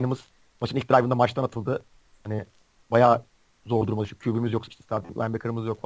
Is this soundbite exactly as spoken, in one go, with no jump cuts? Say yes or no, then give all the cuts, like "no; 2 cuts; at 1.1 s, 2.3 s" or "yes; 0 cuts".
no; 1 cut; at 4.7 s